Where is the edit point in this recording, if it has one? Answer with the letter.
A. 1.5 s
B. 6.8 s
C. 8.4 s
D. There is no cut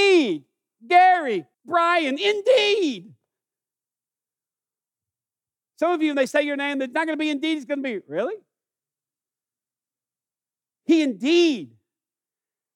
A